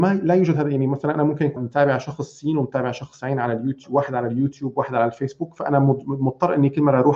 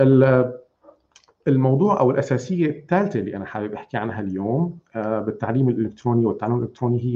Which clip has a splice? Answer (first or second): first